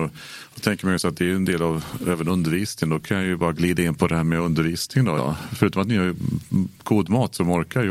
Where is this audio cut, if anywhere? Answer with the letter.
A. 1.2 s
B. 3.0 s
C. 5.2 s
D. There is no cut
C